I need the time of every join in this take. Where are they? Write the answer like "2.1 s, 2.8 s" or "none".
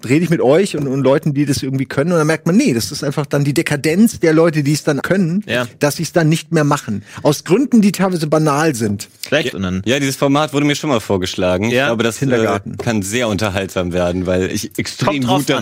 5.0 s, 9.5 s